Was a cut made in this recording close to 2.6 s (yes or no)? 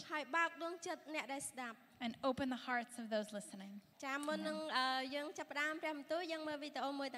no